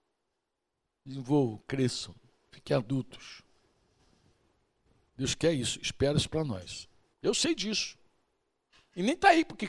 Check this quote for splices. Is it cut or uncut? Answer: cut